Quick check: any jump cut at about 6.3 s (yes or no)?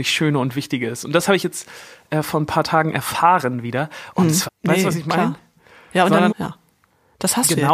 yes